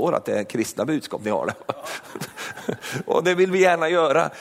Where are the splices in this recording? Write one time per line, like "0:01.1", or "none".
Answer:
none